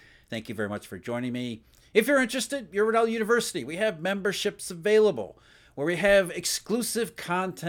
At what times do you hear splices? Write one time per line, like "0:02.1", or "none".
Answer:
none